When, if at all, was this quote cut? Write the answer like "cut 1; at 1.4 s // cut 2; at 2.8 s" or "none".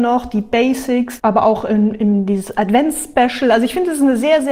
cut 1; at 1.2 s